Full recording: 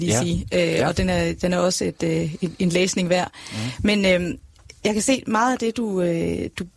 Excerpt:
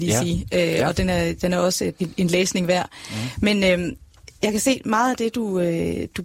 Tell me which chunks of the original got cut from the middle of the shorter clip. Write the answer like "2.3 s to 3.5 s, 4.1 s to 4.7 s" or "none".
2.0 s to 2.4 s